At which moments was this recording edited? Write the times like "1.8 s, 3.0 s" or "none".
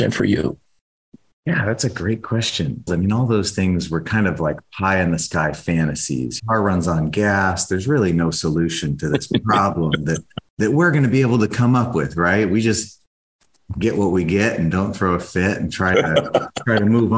2.9 s, 6.4 s